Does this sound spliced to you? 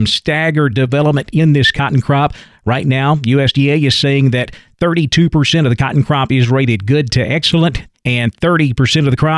yes; 1 cut; at 7.9 s

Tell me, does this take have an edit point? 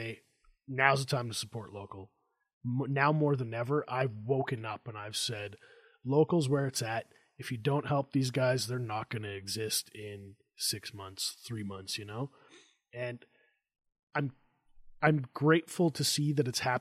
no; 0 cuts

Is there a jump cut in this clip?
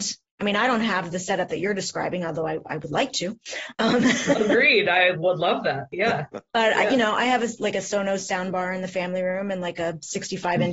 no; 0 cuts

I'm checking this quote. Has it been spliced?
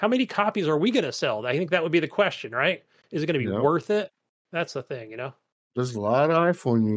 no; 0 cuts

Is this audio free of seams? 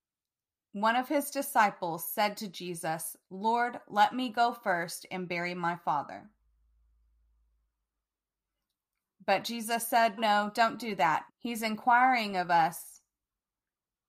no; 2 cuts; at 10.2 s, 11.3 s

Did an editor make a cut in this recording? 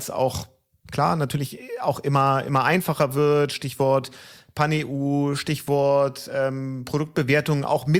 no; 0 cuts

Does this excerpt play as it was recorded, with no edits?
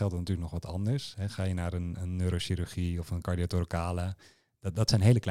yes; 0 cuts

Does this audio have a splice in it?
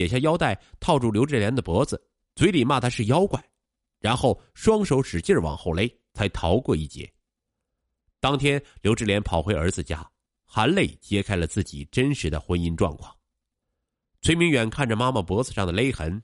yes; 1 cut; at 6.1 s

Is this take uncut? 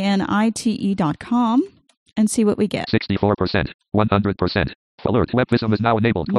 no; 1 cut; at 4.8 s

